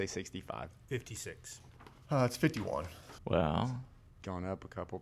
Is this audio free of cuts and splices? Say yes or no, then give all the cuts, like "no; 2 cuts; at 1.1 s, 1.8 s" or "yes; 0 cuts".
no; 1 cut; at 3.2 s